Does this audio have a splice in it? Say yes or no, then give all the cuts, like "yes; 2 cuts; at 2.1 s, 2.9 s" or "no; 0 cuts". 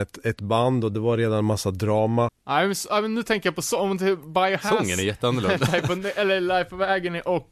yes; 1 cut; at 2.3 s